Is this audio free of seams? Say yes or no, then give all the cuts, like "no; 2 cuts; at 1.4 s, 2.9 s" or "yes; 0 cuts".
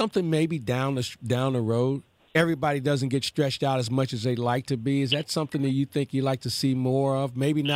no; 1 cut; at 2.3 s